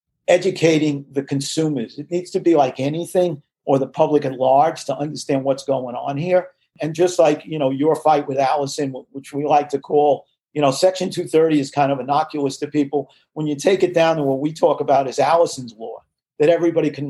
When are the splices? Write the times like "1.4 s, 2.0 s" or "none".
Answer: none

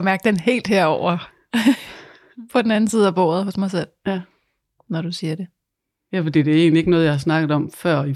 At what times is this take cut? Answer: none

